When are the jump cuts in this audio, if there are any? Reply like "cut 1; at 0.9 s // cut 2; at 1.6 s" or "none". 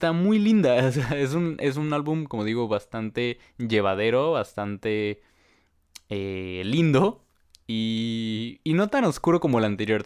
none